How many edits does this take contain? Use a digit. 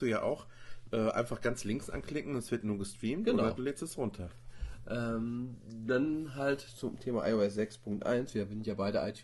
1